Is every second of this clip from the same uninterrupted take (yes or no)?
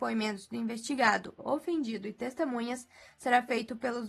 no